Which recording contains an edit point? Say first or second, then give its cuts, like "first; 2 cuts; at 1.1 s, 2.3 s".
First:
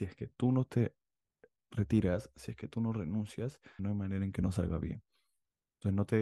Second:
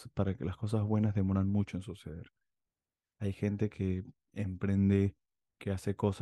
first; 1 cut; at 3.8 s